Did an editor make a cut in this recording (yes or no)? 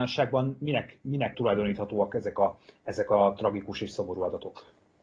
yes